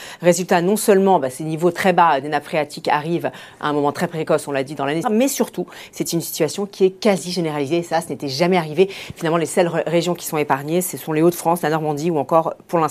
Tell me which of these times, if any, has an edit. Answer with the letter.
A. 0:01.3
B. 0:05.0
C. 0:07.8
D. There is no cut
B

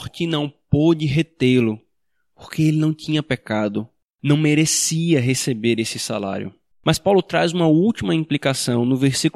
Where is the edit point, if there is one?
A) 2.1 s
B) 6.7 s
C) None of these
B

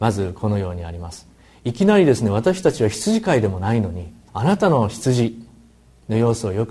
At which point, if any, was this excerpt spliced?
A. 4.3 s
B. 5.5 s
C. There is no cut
A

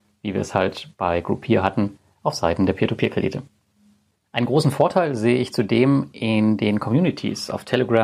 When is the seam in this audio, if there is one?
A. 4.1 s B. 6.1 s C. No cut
C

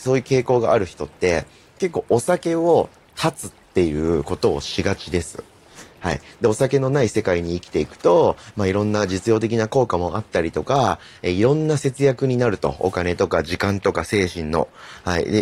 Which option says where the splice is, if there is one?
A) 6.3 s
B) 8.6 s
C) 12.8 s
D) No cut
D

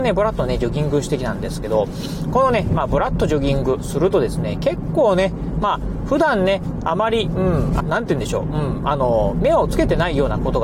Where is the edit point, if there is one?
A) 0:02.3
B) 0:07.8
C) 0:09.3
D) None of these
B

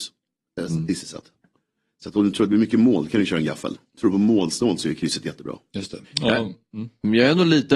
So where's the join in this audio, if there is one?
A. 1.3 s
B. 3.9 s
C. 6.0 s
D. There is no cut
C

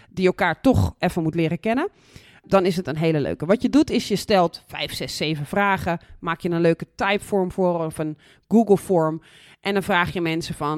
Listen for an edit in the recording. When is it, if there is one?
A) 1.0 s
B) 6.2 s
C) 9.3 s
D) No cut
D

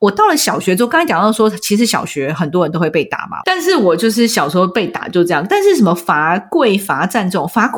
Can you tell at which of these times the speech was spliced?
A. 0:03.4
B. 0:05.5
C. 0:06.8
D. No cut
A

